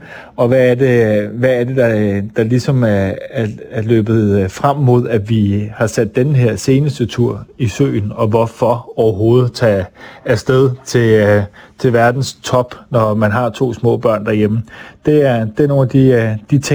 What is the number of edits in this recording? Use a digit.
0